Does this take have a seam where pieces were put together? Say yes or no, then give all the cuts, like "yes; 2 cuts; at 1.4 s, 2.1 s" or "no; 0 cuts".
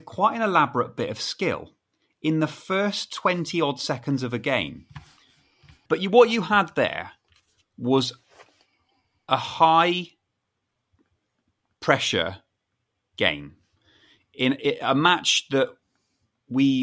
yes; 1 cut; at 5.9 s